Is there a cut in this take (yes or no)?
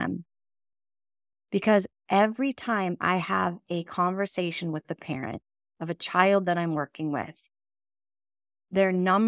no